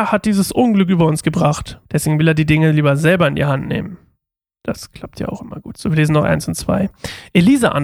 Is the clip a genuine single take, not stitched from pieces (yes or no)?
no